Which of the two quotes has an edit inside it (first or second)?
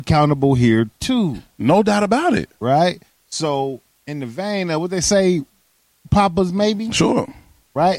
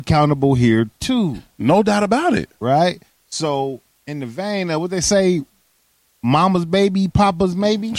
first